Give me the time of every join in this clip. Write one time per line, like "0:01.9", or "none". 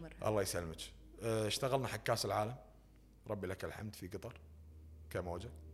none